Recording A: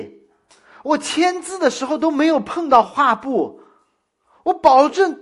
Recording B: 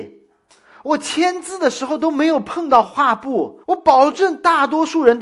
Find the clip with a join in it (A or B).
B